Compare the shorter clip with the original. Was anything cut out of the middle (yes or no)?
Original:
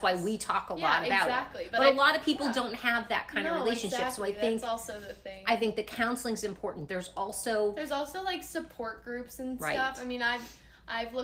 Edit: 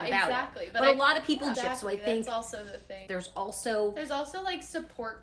yes